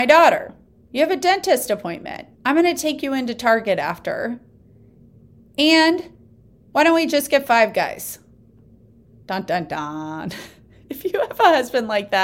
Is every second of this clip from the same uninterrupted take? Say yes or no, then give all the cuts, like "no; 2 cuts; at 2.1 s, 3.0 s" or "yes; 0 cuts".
no; 1 cut; at 2.3 s